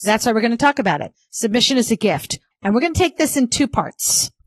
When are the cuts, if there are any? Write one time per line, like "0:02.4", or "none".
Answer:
0:01.1
0:02.5